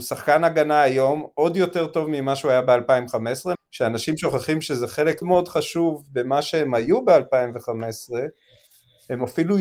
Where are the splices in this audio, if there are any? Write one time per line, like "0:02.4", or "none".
0:03.6
0:05.2